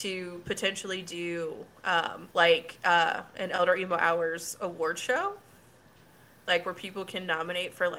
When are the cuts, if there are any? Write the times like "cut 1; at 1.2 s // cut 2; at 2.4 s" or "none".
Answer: cut 1; at 2.3 s